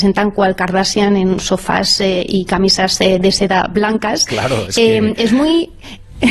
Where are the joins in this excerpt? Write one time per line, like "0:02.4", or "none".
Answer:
none